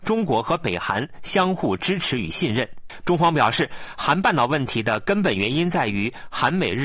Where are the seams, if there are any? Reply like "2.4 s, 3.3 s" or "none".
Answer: 3.0 s